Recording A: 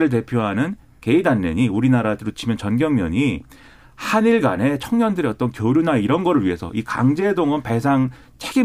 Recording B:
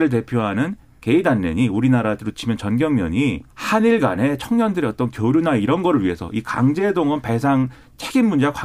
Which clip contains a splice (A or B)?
B